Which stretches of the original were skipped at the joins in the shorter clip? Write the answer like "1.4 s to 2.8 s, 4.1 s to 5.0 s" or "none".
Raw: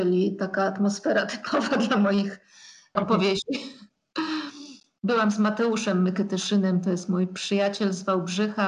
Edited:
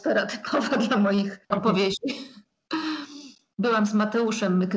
2.4 s to 2.9 s

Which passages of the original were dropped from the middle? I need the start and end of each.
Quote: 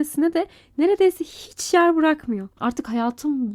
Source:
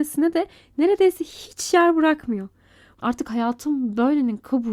2.5 s to 2.9 s

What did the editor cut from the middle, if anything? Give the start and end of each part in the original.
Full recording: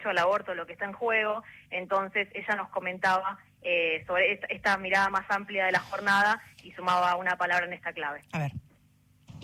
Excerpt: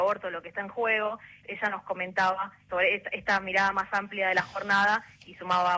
1.7 s to 2.3 s, 3.5 s to 4.1 s

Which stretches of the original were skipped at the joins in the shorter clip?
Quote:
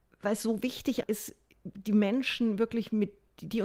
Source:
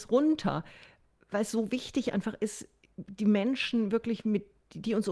2.1 s to 2.4 s

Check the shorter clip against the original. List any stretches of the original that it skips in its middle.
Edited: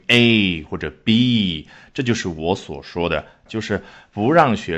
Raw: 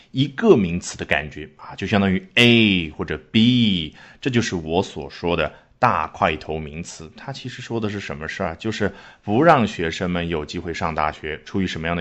5.7 s to 8.6 s

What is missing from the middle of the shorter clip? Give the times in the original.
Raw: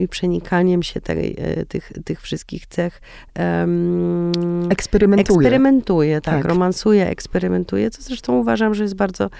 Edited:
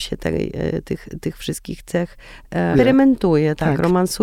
3.6 s to 5.4 s

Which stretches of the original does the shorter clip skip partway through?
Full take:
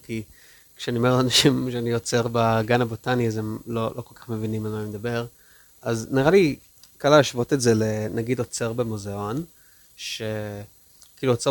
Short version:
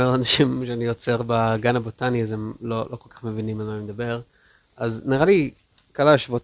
none

